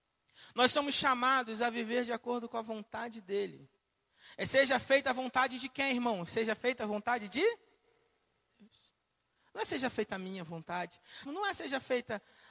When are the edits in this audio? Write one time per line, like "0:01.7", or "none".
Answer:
0:11.3